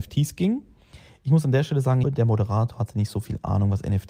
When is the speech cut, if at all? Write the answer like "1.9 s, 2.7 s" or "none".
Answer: 2.0 s